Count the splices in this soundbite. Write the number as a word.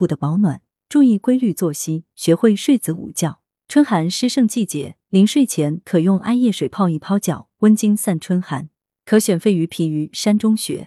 one